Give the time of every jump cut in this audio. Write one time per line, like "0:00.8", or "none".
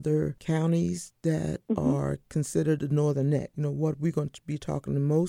none